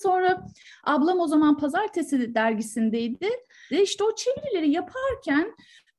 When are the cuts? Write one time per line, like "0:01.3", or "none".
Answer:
0:03.7

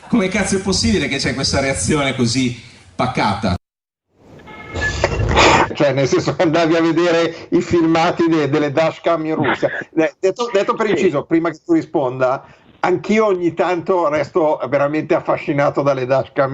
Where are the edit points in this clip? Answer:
0:05.7

